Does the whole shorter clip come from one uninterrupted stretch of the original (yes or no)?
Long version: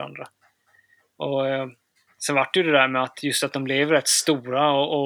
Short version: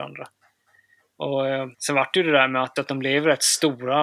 no